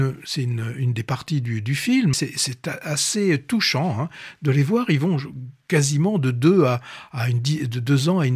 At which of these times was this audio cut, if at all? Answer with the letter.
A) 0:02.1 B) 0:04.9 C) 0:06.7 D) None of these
A